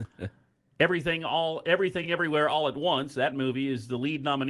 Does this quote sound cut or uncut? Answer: uncut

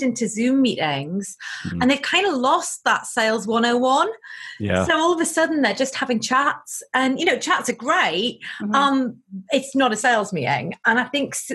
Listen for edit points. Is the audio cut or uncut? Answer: uncut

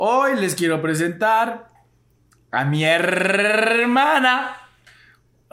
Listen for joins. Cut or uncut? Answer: uncut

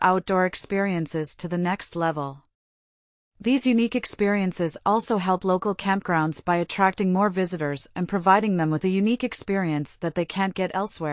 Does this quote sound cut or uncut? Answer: uncut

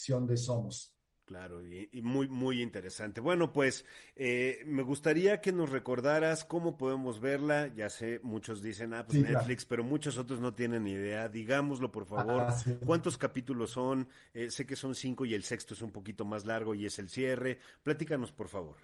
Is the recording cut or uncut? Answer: uncut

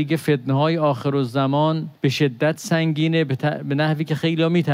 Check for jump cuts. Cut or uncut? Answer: cut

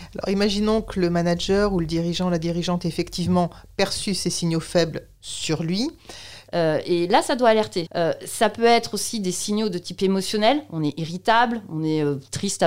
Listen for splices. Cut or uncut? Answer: cut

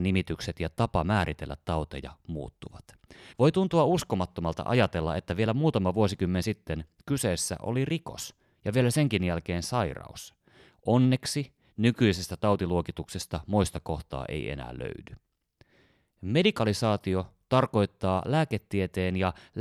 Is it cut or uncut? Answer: cut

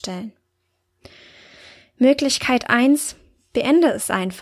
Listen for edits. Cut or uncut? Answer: uncut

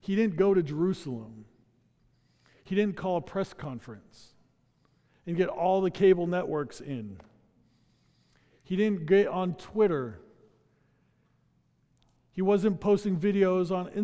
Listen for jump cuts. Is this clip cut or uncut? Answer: uncut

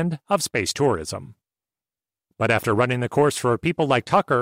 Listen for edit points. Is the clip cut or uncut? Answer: uncut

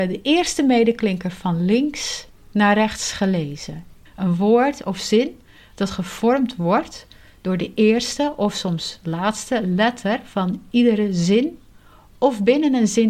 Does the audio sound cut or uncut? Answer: cut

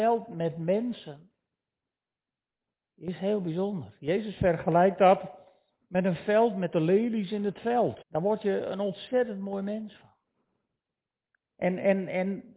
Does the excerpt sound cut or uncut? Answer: cut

